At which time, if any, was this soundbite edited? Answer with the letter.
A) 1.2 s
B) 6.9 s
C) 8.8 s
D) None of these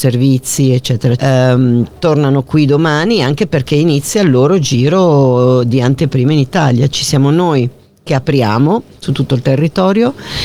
A